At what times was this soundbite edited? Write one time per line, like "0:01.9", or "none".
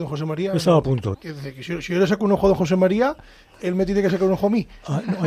0:01.1